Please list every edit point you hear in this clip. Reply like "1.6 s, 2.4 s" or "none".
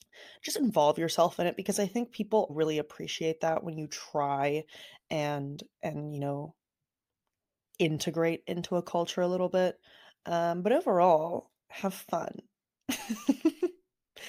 2.5 s